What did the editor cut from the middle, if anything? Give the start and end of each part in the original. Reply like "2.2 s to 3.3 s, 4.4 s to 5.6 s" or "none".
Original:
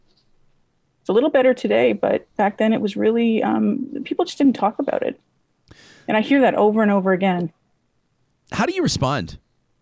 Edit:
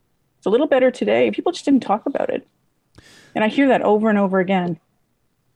1.9 s to 4.0 s